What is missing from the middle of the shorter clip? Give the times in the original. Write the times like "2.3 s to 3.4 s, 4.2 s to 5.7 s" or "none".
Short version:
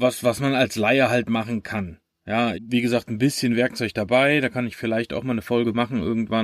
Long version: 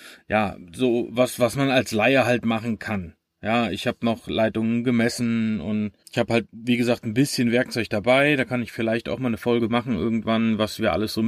3.7 s to 6.5 s